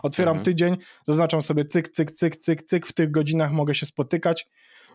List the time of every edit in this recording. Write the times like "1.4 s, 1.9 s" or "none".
none